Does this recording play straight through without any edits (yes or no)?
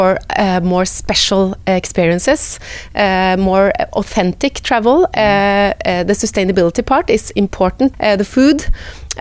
no